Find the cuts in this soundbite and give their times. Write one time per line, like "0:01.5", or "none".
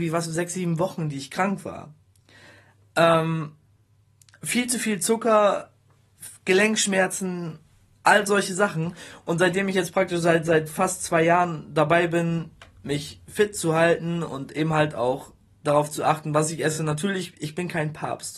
none